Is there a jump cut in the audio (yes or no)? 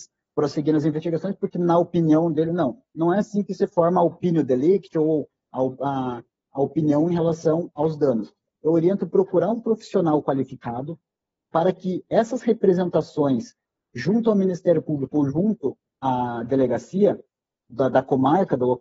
yes